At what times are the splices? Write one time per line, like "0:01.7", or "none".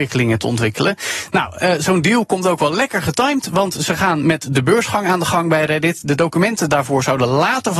none